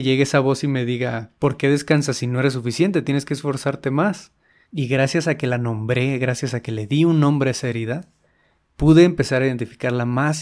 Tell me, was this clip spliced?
yes; 1 cut; at 4.6 s

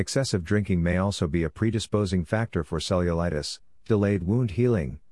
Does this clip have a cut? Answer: no; 0 cuts

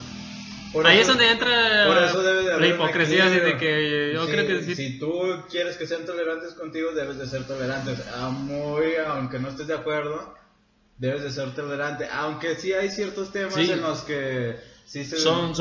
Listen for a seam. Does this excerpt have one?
no; 0 cuts

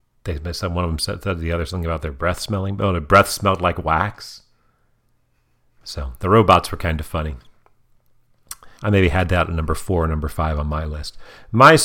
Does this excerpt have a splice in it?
yes; 1 cut; at 8.8 s

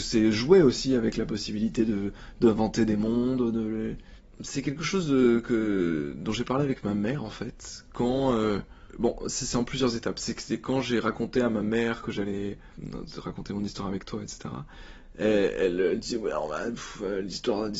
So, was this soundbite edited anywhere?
no; 0 cuts

